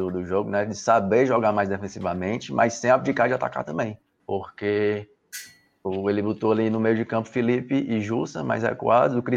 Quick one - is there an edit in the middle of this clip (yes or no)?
yes